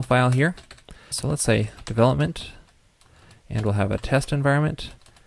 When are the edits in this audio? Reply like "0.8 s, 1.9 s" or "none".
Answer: 1.1 s

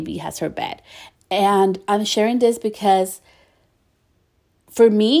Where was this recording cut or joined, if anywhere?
1.1 s

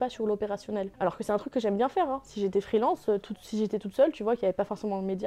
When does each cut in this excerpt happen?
0.9 s

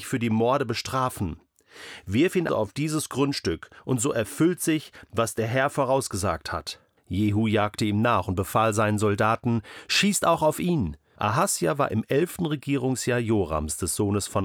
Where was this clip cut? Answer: 2.5 s, 7.0 s, 11.2 s

